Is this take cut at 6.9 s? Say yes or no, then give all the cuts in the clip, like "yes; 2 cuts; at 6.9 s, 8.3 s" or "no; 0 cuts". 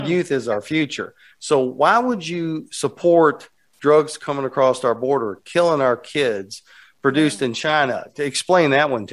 no; 1 cut; at 1.3 s